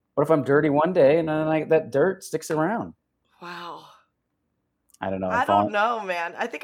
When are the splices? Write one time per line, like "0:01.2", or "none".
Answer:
0:03.2